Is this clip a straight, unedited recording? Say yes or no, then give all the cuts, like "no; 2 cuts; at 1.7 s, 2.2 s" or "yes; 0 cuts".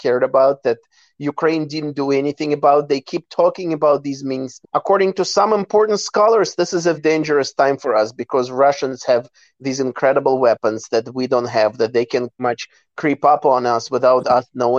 no; 3 cuts; at 4.6 s, 6.9 s, 12.4 s